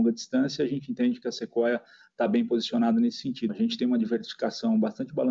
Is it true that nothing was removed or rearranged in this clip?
no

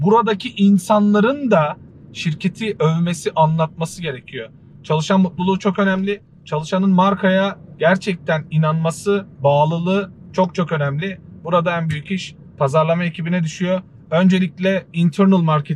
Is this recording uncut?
yes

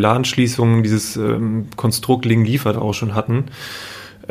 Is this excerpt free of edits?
no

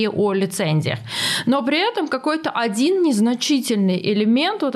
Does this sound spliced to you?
no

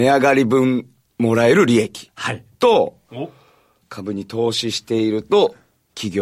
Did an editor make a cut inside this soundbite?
no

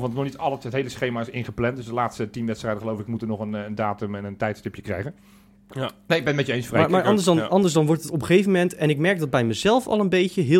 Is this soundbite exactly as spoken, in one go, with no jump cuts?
yes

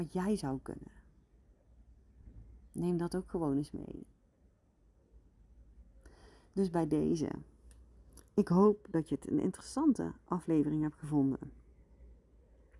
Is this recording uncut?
yes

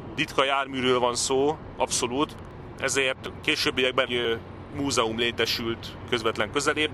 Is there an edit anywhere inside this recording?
yes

